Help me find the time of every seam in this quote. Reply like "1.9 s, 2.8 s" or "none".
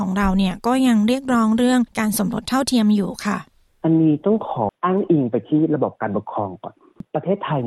4.7 s